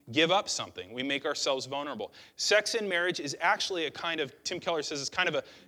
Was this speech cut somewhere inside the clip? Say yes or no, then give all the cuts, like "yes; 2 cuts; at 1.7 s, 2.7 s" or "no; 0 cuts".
no; 0 cuts